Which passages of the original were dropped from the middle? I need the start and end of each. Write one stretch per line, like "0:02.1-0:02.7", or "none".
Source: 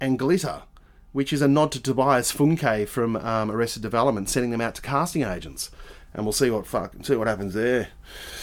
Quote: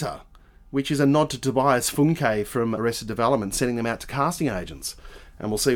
0:03.2-0:03.5